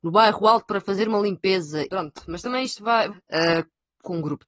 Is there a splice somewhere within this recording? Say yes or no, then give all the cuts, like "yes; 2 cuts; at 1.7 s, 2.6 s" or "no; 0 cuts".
yes; 2 cuts; at 1.9 s, 3.1 s